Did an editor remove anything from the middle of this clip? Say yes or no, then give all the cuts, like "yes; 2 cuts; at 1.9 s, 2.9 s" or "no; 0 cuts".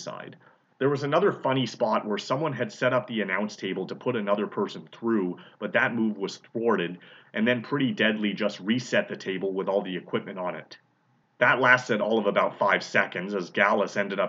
no; 0 cuts